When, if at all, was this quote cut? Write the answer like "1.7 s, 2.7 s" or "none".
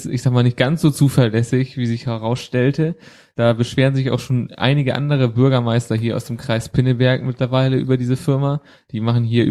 none